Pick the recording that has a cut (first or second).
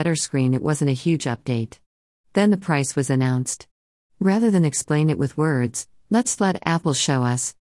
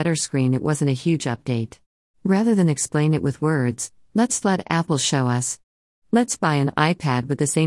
second